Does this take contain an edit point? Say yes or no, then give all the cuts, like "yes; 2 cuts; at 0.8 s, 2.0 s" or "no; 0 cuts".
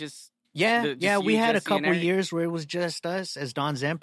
no; 0 cuts